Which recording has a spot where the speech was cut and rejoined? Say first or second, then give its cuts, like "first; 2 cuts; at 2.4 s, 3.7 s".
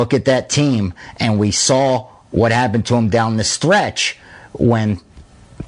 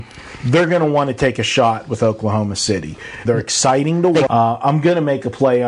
second; 2 cuts; at 3.3 s, 4.3 s